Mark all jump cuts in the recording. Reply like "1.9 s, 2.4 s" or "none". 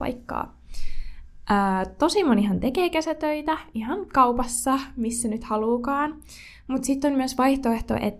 none